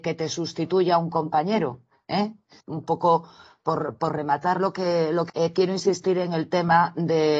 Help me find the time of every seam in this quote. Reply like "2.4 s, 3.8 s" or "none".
2.6 s, 5.3 s